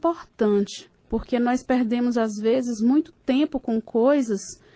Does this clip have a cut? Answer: yes; 1 cut; at 1.0 s

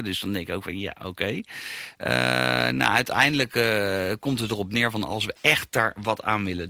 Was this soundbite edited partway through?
no; 0 cuts

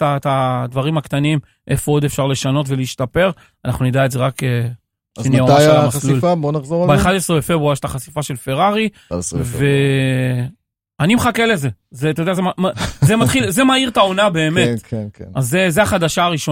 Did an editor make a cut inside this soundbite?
no; 0 cuts

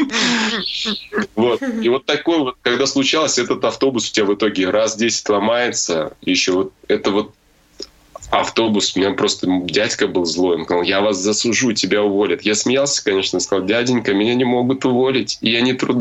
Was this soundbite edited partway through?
no; 0 cuts

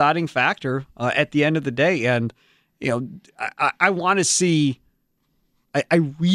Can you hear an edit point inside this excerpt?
no; 0 cuts

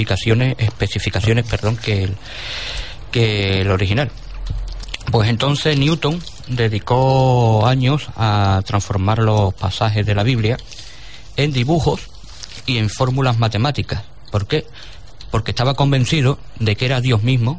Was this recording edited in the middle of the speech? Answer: no; 0 cuts

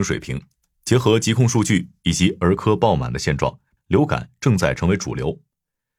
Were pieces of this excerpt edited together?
yes; 1 cut; at 3.8 s

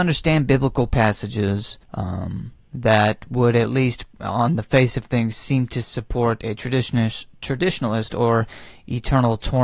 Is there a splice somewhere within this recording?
yes; 1 cut; at 1.8 s

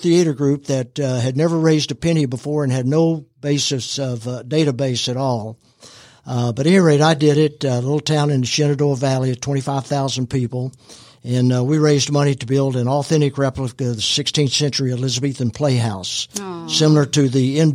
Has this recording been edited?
no; 0 cuts

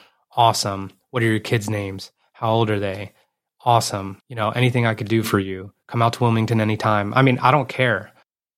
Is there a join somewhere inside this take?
yes; 1 cut; at 4.2 s

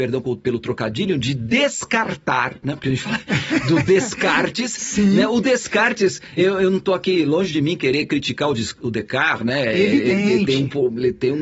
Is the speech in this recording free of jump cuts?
no; 1 cut; at 6.4 s

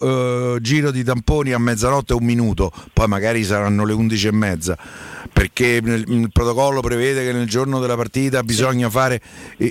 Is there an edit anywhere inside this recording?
no; 0 cuts

